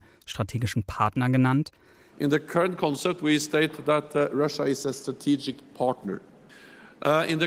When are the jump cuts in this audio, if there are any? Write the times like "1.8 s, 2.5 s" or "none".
2.1 s